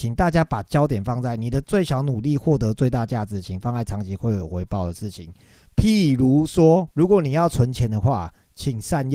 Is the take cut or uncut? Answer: cut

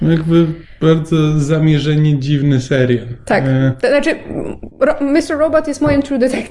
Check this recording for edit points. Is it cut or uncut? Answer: uncut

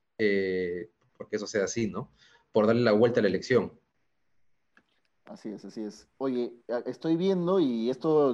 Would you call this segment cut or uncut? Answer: cut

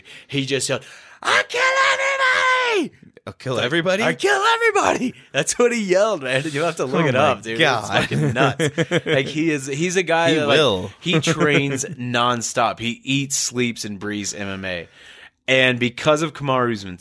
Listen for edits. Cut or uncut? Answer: uncut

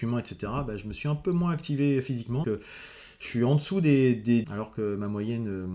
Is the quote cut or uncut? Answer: cut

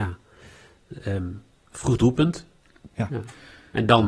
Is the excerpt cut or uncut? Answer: cut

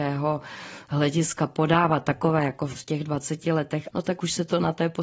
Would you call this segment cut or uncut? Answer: cut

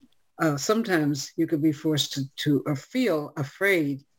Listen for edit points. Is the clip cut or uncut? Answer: uncut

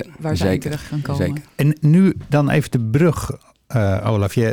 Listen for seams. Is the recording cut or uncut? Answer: uncut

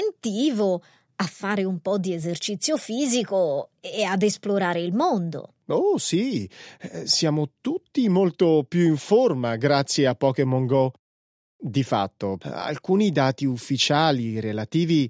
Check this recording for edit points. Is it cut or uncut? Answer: cut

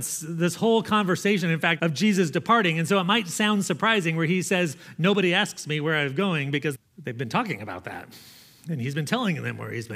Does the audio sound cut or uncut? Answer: cut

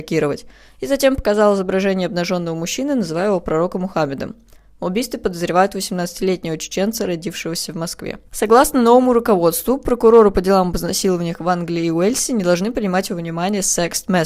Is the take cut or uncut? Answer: cut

